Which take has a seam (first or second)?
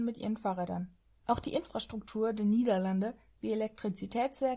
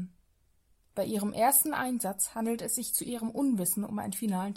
first